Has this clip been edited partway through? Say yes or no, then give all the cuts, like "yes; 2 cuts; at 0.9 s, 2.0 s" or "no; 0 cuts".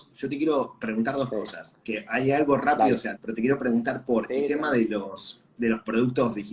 yes; 1 cut; at 3.1 s